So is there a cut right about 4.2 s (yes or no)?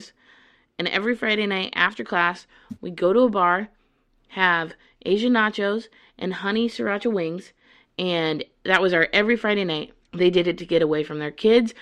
no